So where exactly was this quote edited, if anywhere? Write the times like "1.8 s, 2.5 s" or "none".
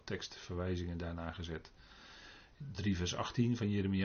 none